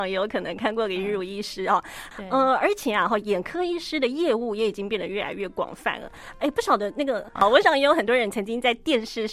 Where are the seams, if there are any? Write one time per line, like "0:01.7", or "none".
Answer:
0:02.1
0:07.4